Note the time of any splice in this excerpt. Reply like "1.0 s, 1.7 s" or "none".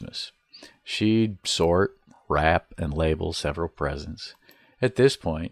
none